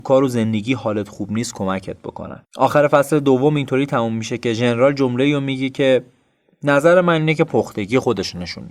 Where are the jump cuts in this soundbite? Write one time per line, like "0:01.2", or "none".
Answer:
none